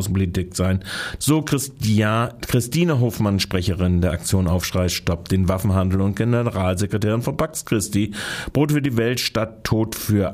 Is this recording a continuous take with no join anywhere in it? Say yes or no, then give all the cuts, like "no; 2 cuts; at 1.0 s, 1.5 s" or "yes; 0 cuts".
no; 1 cut; at 1.2 s